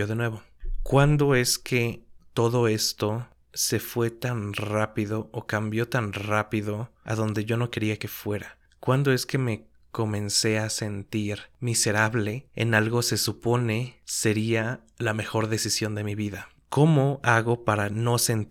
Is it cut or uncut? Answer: uncut